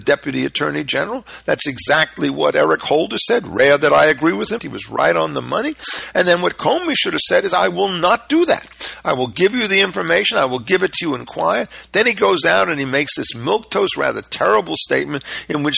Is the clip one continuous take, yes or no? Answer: no